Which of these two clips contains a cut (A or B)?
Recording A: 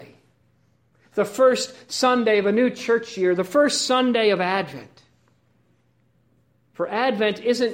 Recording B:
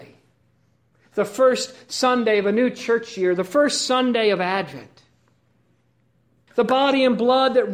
B